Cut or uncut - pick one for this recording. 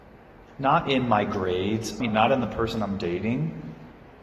cut